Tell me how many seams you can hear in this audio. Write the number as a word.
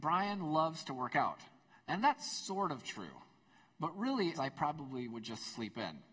one